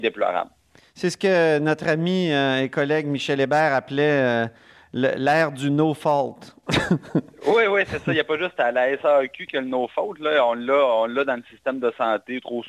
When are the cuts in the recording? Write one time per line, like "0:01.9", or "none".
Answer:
none

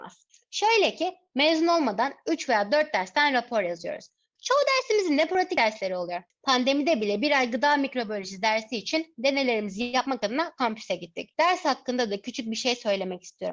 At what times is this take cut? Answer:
0:04.4
0:11.3

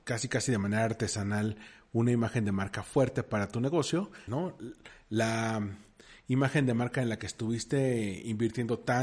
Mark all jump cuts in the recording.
0:04.3

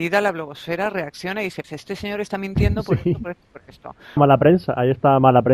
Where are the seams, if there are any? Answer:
0:01.6
0:04.2

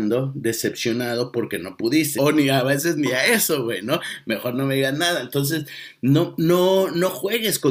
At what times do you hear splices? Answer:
0:02.2
0:06.4

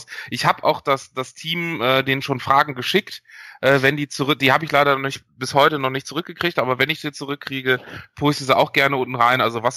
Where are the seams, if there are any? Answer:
none

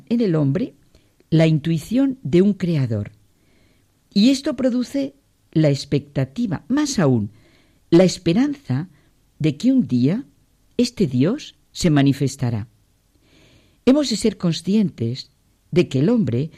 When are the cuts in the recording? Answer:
none

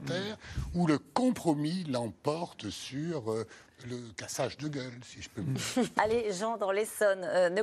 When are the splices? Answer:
0:06.0

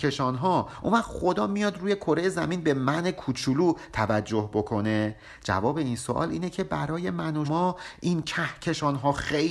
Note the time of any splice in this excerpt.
0:07.4

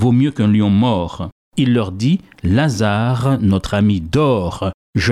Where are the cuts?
0:01.4

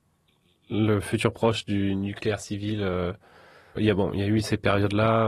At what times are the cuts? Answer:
0:03.8

